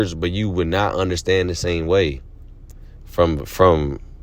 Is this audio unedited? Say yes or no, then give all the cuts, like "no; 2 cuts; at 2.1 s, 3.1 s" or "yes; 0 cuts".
no; 1 cut; at 3.0 s